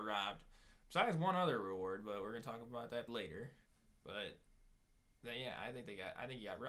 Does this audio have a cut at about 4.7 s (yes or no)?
no